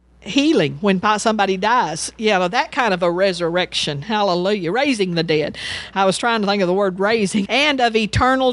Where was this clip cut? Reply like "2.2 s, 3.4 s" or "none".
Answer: 7.4 s

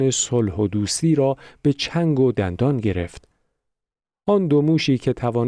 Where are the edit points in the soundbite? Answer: none

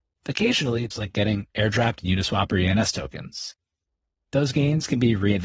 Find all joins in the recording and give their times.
0.9 s

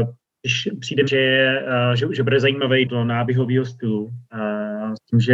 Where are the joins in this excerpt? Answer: 1.1 s, 2.9 s

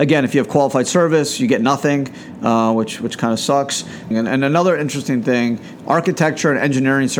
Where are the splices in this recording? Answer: 4.1 s

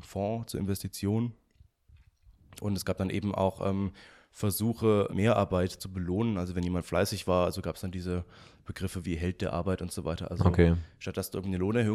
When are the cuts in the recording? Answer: 5.1 s

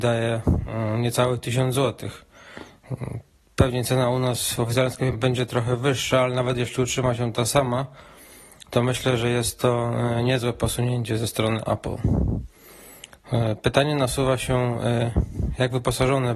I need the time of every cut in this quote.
5.1 s

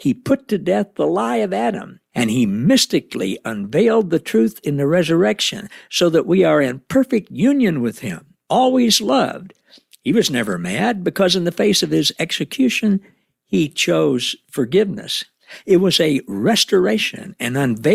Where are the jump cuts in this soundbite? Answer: none

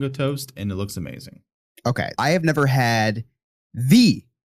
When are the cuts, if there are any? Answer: 2.1 s

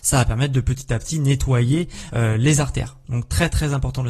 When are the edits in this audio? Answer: none

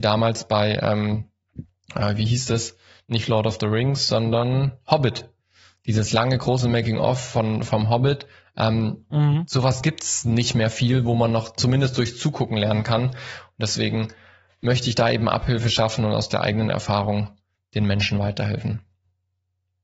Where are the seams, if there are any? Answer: none

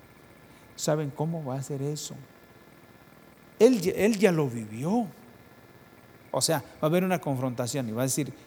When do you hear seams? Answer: 6.2 s

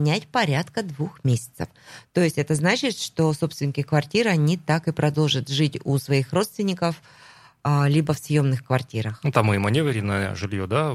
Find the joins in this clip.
none

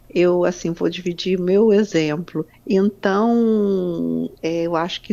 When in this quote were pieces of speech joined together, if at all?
2.5 s

